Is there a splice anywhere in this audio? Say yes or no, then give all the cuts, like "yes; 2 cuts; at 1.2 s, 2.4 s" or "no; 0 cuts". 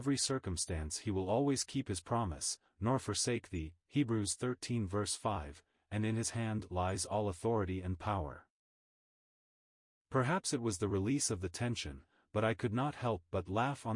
yes; 1 cut; at 2.7 s